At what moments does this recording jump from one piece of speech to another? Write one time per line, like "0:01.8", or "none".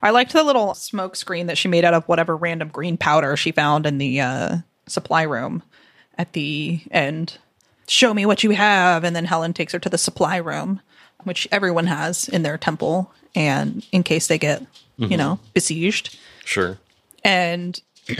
none